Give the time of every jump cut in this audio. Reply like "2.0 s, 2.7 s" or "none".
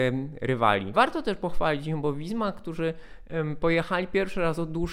0.9 s